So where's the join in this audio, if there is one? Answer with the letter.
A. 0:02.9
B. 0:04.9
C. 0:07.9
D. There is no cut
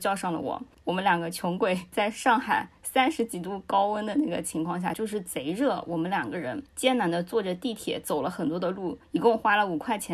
B